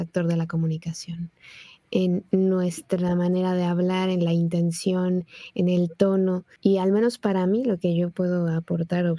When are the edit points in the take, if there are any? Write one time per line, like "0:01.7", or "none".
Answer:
none